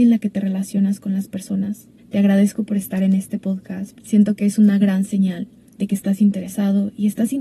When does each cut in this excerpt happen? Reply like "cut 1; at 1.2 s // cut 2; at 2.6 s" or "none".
cut 1; at 2.0 s // cut 2; at 4.0 s